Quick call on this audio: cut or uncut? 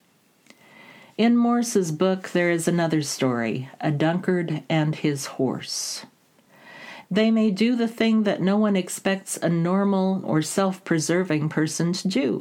cut